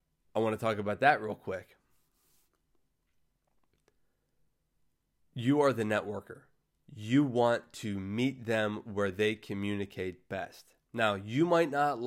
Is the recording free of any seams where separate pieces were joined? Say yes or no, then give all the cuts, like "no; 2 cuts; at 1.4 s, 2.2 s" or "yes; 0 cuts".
yes; 0 cuts